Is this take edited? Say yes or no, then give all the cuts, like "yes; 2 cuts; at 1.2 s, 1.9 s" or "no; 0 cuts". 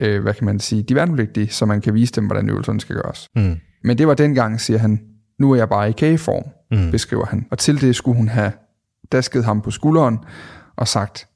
no; 0 cuts